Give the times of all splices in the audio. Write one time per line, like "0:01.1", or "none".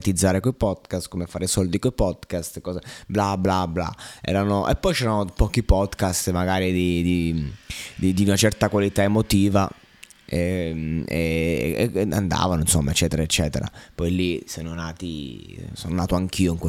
none